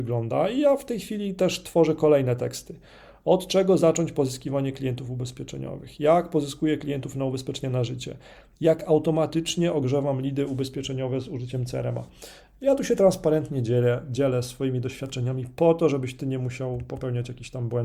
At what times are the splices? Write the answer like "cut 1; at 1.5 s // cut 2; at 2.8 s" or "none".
none